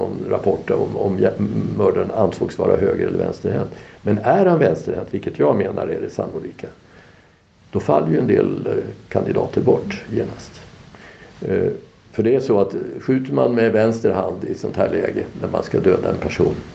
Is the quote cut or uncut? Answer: uncut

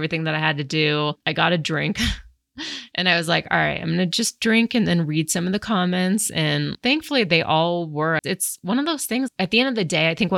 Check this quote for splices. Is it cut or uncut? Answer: cut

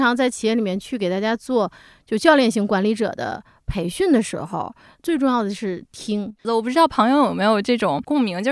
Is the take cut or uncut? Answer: cut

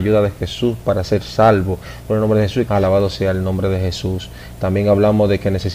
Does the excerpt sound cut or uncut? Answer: cut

